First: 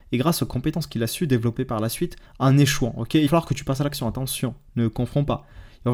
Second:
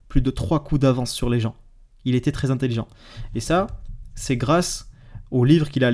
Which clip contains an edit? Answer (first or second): first